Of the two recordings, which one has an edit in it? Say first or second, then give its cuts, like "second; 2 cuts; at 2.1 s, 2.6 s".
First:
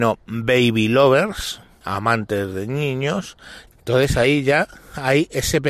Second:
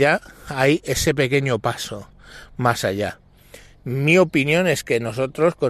first; 2 cuts; at 1.8 s, 3.7 s